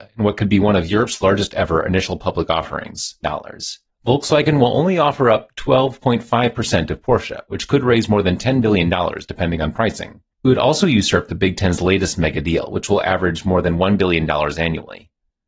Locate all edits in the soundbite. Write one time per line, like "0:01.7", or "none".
0:03.2
0:10.3